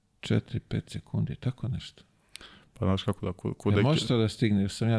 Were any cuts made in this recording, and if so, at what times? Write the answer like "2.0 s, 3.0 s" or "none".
none